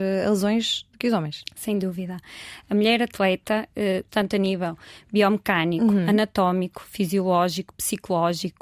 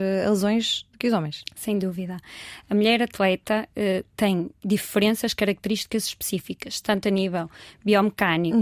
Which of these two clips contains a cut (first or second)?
first